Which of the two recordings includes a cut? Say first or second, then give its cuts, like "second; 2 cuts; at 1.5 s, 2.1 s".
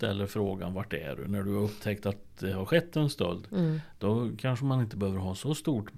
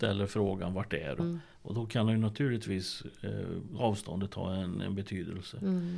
second; 1 cut; at 1.2 s